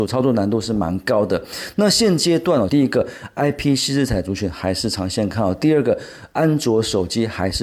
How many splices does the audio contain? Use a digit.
1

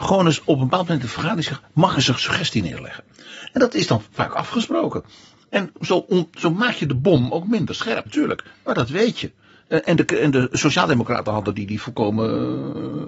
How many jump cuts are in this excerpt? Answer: 2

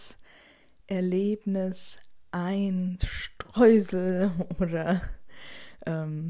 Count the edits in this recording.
1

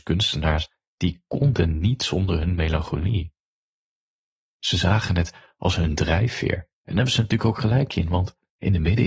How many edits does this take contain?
0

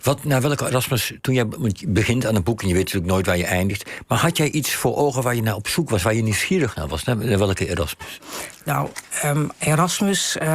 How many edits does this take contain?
0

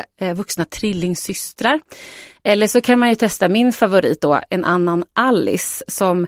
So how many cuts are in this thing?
0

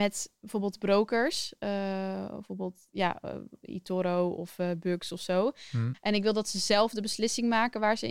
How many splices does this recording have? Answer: 1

